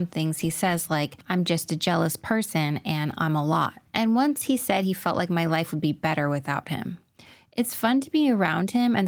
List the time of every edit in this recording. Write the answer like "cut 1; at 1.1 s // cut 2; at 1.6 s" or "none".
none